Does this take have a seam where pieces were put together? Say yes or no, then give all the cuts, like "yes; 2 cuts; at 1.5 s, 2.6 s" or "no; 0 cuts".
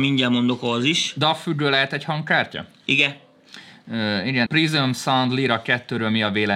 yes; 1 cut; at 4.5 s